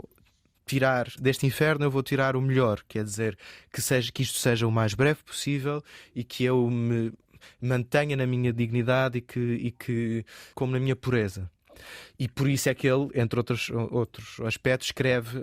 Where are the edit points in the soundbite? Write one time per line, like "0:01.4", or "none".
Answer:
0:01.2
0:10.5